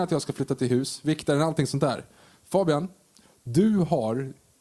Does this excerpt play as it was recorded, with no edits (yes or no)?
yes